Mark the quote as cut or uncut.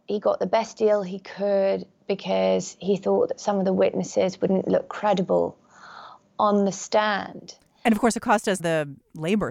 cut